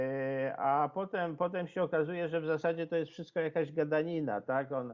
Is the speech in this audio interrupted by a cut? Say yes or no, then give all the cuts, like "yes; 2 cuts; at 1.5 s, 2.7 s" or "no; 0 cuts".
no; 0 cuts